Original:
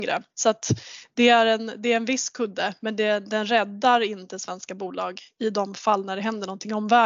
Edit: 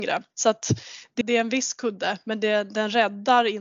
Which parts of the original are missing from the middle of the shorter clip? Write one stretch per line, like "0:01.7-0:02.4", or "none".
0:01.2-0:01.8